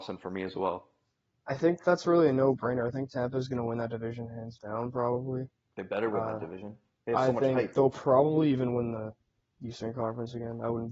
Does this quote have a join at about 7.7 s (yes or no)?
no